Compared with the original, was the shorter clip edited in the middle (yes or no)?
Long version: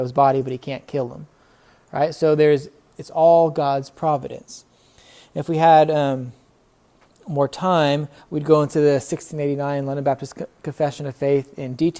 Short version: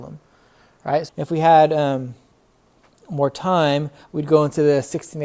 yes